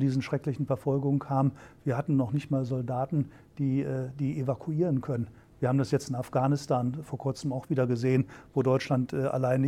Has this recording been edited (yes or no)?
no